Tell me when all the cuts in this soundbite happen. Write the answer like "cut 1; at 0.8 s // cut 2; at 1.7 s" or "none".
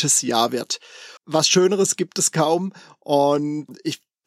cut 1; at 1.2 s